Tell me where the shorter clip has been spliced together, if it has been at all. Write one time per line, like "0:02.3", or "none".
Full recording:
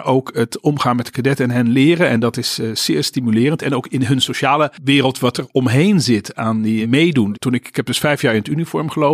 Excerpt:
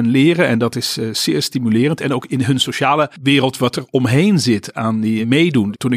none